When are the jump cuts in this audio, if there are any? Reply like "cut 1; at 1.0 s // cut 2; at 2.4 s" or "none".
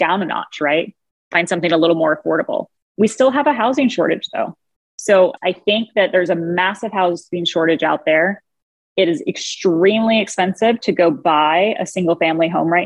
cut 1; at 5.4 s